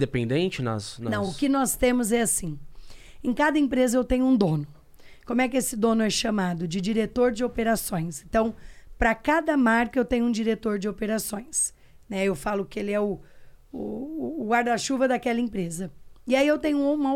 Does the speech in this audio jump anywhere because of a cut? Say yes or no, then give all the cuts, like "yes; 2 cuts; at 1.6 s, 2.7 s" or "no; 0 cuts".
no; 0 cuts